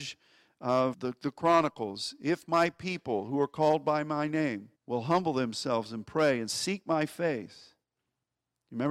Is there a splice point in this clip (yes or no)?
yes